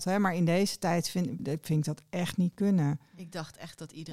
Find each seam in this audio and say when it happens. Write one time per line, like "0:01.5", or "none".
0:01.4